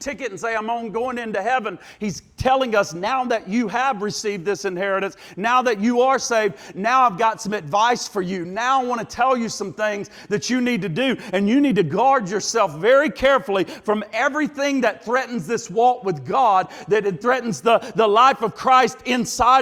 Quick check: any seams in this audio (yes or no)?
no